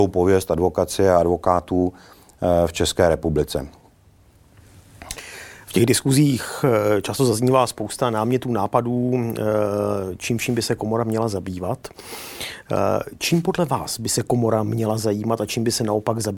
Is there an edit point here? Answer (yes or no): no